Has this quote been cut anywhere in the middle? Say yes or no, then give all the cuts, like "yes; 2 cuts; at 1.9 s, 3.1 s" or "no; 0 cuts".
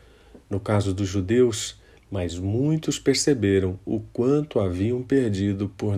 yes; 1 cut; at 2.0 s